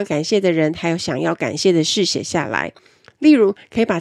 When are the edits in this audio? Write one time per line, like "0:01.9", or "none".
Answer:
none